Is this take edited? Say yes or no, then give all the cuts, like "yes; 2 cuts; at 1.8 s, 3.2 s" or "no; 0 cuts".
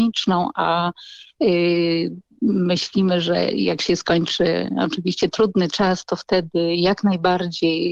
no; 0 cuts